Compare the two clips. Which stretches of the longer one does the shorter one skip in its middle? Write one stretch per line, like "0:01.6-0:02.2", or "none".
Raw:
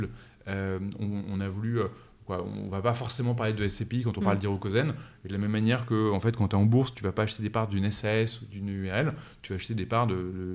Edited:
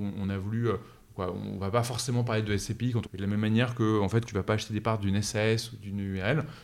0:04.2-0:05.2
0:06.4-0:06.9